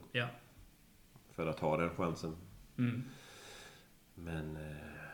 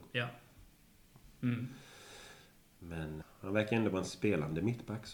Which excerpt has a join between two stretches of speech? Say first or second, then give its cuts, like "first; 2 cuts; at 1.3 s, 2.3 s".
second; 2 cuts; at 1.2 s, 3.2 s